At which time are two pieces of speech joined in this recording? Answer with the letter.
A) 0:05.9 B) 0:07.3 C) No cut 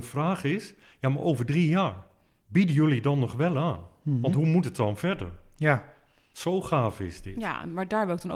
C